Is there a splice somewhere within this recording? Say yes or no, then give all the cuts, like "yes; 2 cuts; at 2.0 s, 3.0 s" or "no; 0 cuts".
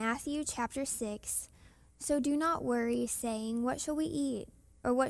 no; 0 cuts